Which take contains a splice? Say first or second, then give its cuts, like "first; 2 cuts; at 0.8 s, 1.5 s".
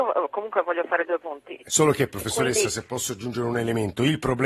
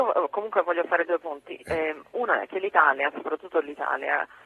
first; 1 cut; at 1.7 s